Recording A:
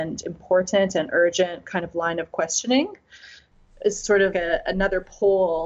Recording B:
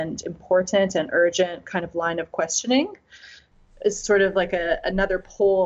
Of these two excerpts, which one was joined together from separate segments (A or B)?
A